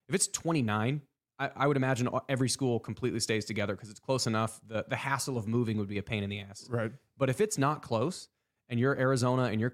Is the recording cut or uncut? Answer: uncut